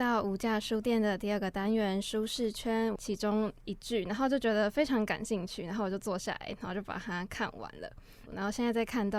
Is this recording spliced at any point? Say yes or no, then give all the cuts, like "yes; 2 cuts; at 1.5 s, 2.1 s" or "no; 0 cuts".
yes; 2 cuts; at 3.0 s, 8.3 s